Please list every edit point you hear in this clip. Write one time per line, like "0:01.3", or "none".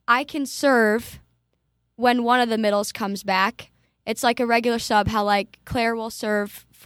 none